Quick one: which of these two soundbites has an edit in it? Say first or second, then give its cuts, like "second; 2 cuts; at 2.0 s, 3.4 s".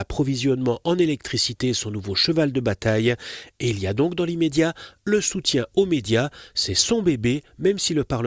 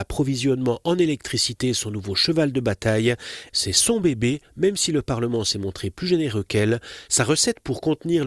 second; 2 cuts; at 3.5 s, 7.1 s